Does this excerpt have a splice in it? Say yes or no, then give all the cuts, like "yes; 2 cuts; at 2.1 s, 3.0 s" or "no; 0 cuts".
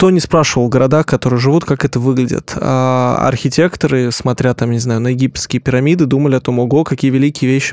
no; 0 cuts